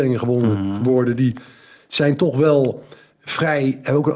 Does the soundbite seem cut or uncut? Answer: uncut